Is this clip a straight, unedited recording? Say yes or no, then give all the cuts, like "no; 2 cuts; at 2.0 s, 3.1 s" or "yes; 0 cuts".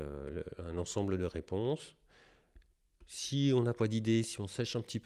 yes; 0 cuts